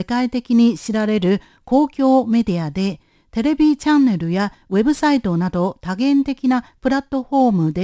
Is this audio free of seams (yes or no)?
yes